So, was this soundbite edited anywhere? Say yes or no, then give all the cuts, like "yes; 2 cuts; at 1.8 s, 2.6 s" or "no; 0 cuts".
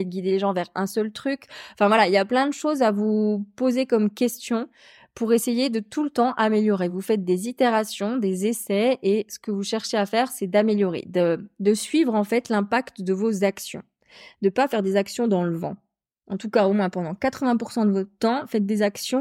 no; 0 cuts